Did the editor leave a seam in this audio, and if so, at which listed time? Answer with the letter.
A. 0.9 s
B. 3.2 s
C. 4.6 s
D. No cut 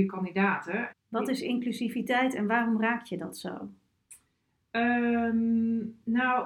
A